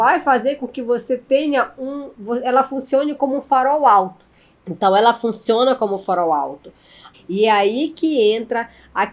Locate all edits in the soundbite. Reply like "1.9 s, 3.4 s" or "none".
4.5 s, 7.1 s